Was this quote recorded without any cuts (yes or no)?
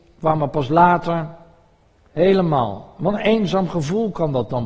no